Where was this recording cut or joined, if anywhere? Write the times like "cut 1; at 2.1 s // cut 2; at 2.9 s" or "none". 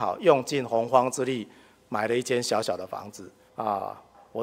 cut 1; at 3.5 s